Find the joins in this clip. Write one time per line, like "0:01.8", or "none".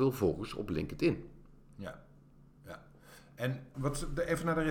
0:03.7